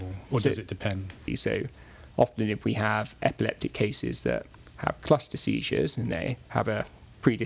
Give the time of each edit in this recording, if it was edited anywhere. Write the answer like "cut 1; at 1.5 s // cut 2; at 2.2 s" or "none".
cut 1; at 1.3 s